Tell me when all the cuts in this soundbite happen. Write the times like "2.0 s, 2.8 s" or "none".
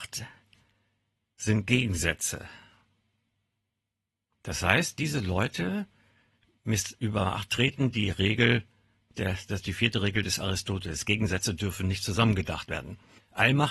none

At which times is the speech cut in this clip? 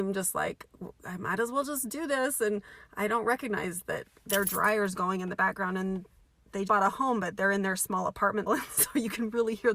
6.7 s, 8.5 s

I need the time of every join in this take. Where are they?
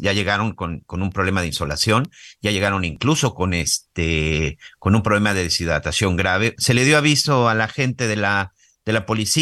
6.6 s

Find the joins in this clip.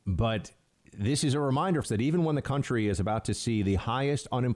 1.8 s

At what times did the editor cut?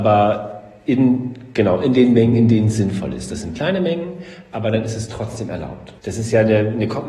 6.0 s

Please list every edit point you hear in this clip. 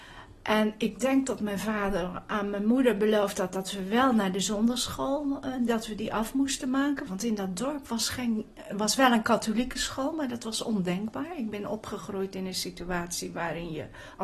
7.1 s

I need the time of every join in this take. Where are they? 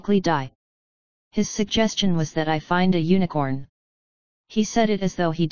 none

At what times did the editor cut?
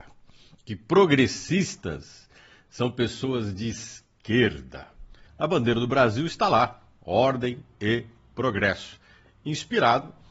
5.3 s

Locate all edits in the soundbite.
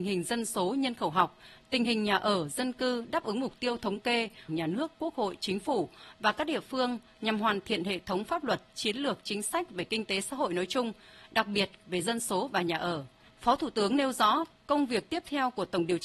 4.5 s

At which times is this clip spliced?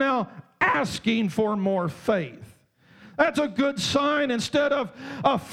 3.3 s

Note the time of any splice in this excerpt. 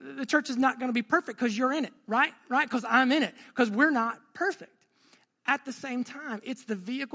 none

